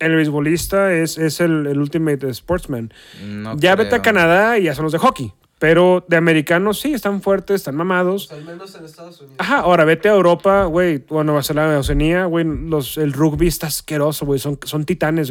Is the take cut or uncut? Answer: uncut